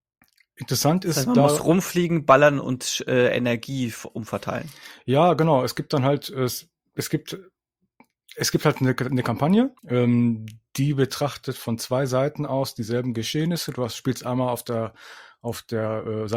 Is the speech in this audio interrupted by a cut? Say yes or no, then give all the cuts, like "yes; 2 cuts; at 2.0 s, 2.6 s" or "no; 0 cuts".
yes; 1 cut; at 9.8 s